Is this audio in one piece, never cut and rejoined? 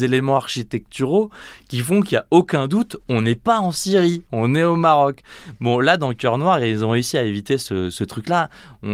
yes; 0 cuts

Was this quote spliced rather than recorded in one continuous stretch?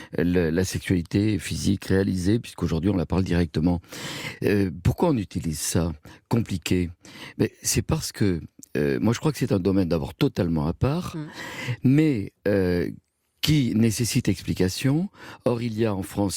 no; 0 cuts

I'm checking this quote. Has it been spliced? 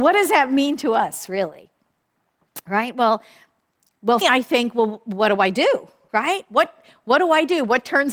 yes; 1 cut; at 4.2 s

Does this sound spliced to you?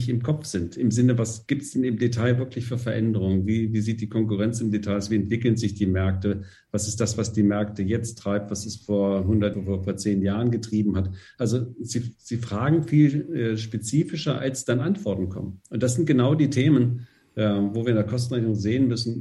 yes; 1 cut; at 9.5 s

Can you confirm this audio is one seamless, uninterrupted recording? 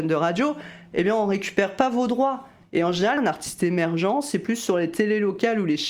no; 1 cut; at 3.2 s

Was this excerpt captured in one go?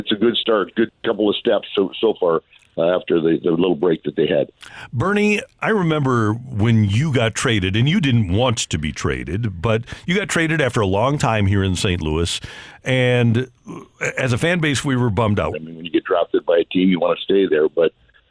no; 1 cut; at 15.5 s

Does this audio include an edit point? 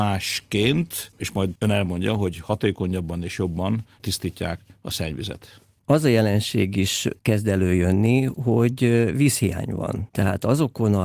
yes; 1 cut; at 5.8 s

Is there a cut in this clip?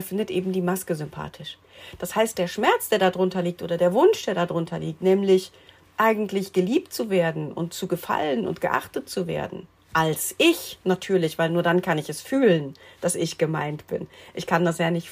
no; 0 cuts

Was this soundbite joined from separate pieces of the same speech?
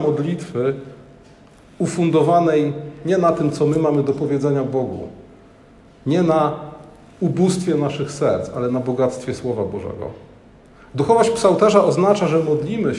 no; 0 cuts

